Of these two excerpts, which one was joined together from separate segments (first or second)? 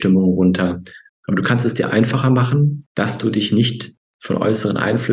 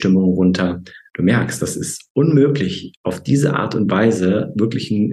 first